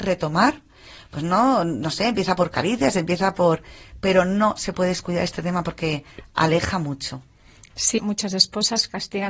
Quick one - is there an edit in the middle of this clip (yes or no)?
yes